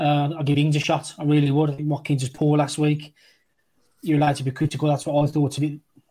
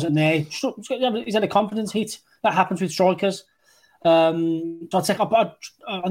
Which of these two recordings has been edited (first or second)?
second